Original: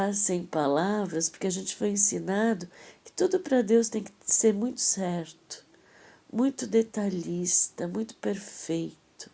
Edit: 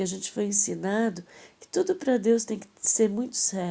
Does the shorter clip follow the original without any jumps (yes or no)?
yes